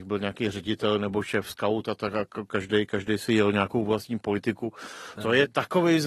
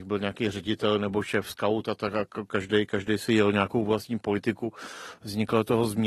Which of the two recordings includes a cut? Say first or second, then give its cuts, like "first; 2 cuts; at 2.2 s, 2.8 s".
first; 1 cut; at 5.1 s